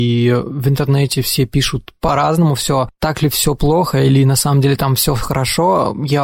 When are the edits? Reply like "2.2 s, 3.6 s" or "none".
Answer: none